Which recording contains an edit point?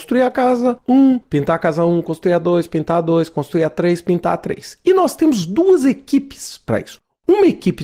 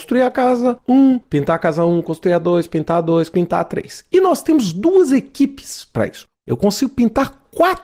second; 2 cuts; at 3.3 s, 6.3 s

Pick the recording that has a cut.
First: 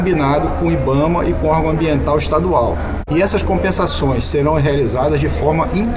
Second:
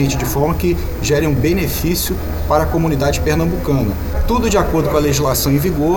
first; 1 cut; at 3.1 s

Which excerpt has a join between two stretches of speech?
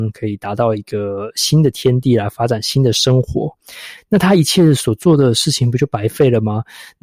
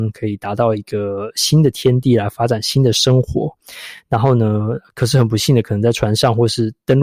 first; 1 cut; at 4.0 s

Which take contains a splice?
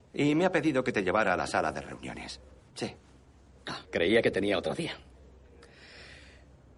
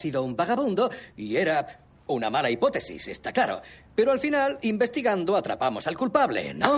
first; 2 cuts; at 2.6 s, 3.8 s

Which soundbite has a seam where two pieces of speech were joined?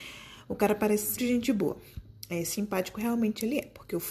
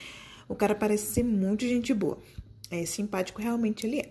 first; 1 cut; at 1.2 s

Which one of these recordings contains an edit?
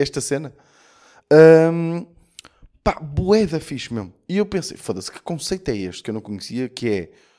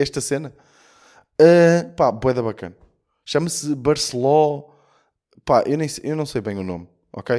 first; 1 cut; at 1.2 s

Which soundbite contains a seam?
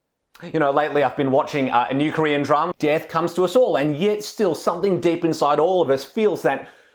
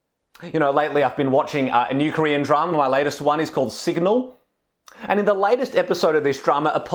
first; 1 cut; at 2.7 s

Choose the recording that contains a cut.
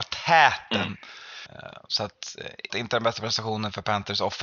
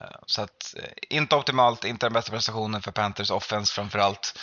first; 2 cuts; at 1.5 s, 2.7 s

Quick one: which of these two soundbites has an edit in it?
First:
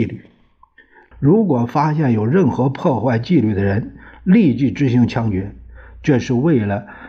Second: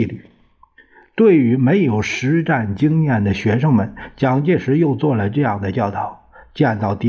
first; 1 cut; at 1.1 s

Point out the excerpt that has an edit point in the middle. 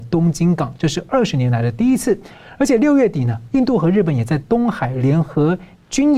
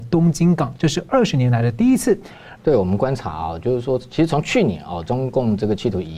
second; 1 cut; at 2.6 s

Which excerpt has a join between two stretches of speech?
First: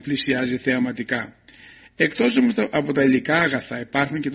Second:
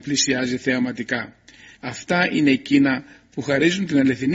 second; 1 cut; at 1.7 s

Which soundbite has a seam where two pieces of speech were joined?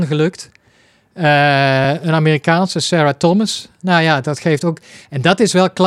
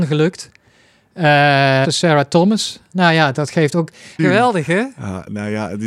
second; 2 cuts; at 1.8 s, 4.2 s

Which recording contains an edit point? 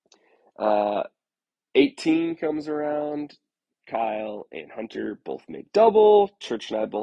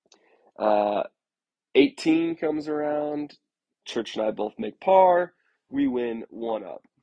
second; 1 cut; at 3.8 s

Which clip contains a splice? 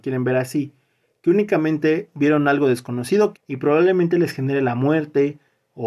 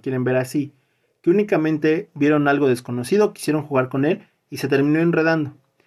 first; 1 cut; at 3.3 s

